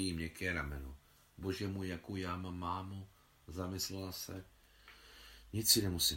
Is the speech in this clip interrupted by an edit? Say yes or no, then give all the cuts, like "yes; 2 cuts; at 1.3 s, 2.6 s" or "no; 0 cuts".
no; 0 cuts